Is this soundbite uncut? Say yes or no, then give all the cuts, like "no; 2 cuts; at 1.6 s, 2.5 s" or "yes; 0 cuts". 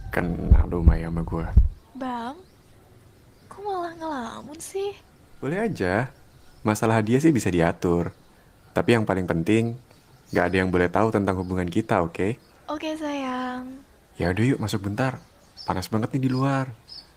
yes; 0 cuts